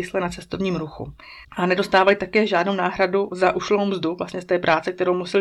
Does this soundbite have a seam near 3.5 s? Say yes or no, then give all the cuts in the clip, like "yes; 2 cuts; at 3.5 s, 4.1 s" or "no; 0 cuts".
no; 1 cut; at 1.4 s